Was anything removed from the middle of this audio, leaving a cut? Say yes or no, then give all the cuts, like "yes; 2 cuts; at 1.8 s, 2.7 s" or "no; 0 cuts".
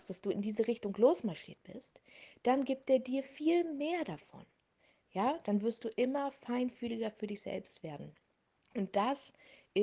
no; 0 cuts